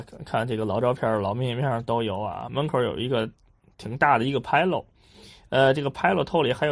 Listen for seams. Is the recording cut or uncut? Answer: uncut